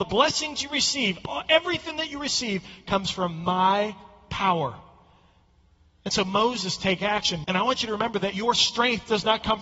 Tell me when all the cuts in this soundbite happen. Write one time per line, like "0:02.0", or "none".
0:07.4